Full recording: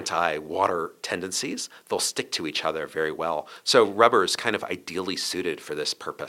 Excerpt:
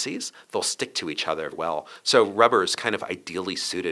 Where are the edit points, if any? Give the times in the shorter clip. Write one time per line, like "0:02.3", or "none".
0:01.5

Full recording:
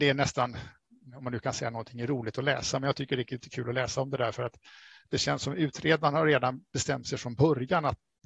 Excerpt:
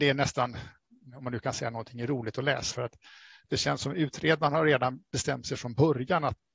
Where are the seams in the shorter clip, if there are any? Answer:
0:02.7

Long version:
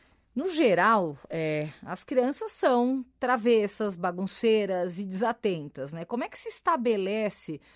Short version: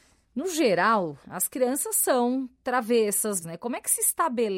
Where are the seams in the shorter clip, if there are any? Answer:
0:01.2
0:03.4

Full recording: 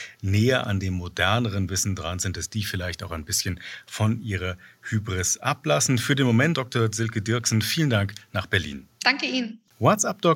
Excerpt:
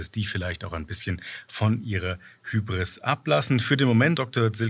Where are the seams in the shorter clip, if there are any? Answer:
none

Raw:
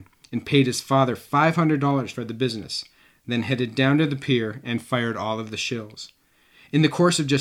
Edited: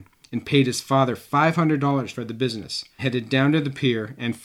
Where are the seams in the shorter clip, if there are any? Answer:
0:03.0

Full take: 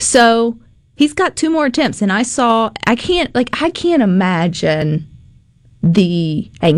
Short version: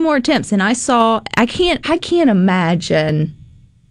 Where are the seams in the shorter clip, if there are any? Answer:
0:01.8

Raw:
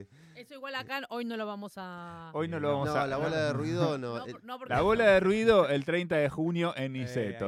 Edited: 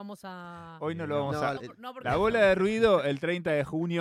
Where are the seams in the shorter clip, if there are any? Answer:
0:01.6

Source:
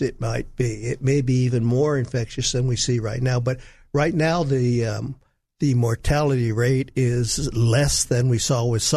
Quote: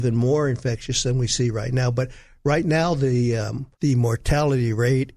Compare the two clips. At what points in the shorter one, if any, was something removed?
0:03.7

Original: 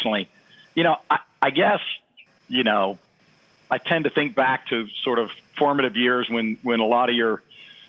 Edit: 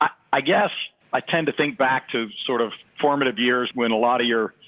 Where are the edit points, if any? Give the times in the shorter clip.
0:01.0
0:03.7

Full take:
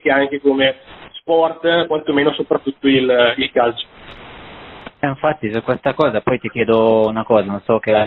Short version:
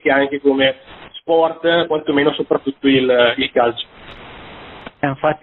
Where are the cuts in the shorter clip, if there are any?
none

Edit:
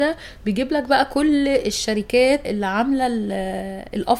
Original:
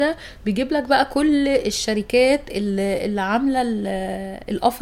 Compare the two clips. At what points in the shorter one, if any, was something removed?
0:02.4

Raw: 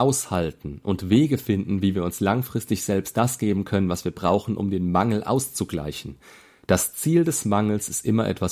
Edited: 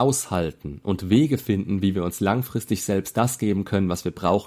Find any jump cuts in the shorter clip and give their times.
none

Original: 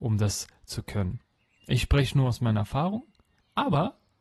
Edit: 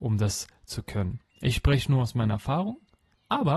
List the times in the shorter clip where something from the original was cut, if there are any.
0:01.3

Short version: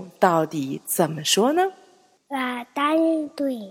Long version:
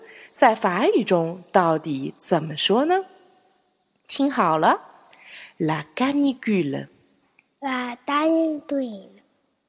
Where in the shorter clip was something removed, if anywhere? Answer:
0:02.2

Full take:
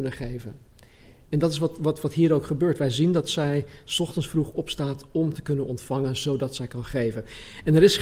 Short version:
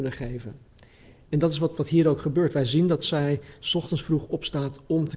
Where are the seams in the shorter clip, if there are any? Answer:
0:01.8

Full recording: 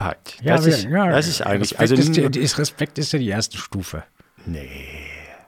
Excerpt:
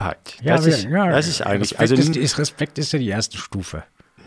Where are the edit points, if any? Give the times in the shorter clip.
0:02.1

